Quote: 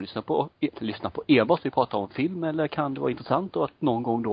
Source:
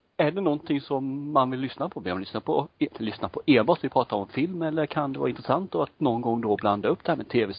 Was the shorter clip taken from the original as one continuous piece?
yes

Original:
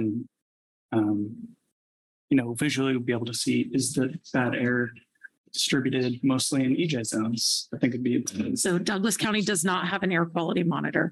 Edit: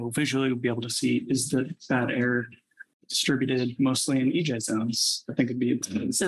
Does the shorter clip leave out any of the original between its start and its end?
no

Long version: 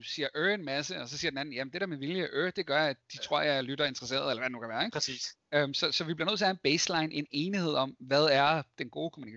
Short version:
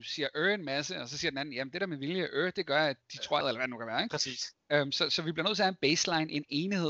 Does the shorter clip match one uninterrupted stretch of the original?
no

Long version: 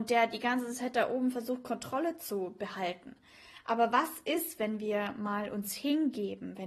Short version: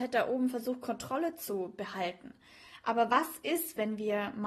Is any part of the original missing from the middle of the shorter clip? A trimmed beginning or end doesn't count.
no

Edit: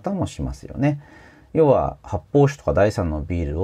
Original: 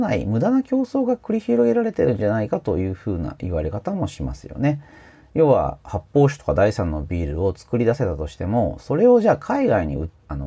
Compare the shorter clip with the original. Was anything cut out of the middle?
no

